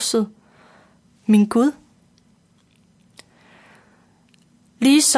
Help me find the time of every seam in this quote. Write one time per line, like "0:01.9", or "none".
0:01.2